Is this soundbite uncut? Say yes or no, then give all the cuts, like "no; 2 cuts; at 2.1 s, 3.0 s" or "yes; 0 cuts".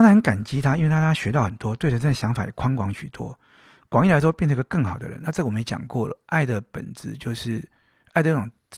yes; 0 cuts